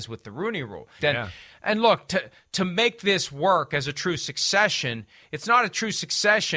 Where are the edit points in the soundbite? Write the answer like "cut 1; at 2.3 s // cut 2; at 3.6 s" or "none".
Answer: cut 1; at 1.0 s